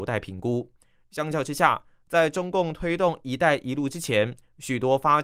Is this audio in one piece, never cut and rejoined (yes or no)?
yes